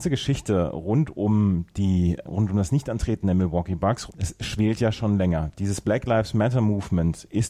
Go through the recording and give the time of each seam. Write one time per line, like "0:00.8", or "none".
0:02.2
0:04.1

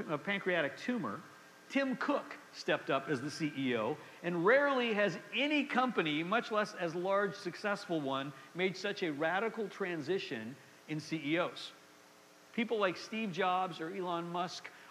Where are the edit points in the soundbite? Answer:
0:12.5

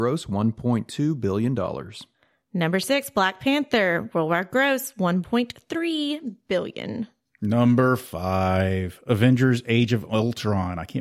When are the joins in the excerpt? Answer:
none

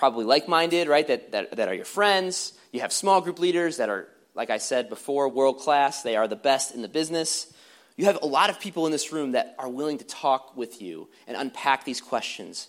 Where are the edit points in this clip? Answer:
none

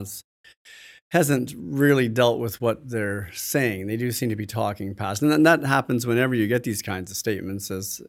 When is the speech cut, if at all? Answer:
none

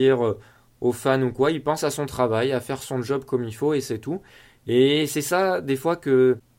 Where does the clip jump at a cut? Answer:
none

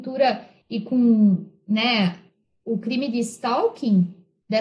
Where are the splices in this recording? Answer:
none

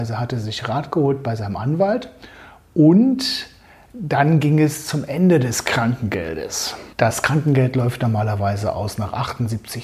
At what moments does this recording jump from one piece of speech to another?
0:06.9

